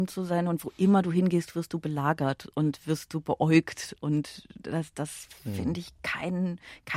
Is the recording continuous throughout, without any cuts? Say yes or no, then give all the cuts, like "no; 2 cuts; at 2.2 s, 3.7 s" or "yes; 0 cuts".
yes; 0 cuts